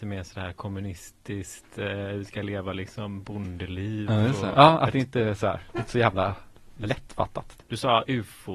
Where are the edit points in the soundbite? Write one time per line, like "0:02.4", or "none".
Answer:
0:04.5
0:07.6